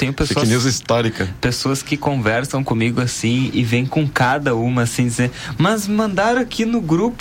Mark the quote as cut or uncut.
uncut